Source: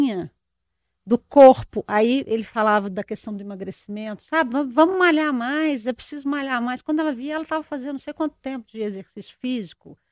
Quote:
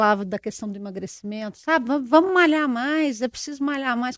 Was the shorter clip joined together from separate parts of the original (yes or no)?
no